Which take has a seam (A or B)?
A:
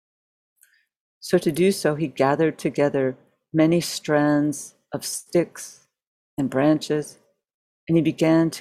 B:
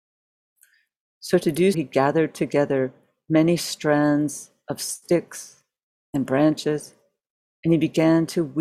B